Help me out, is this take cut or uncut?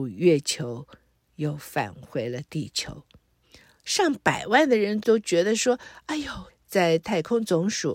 cut